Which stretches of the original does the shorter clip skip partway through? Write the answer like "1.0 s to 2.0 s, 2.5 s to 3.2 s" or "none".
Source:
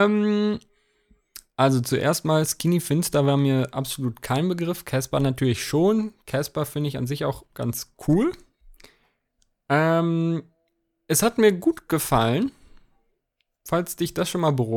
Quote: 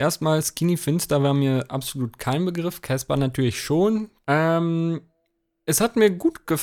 6.2 s to 9.6 s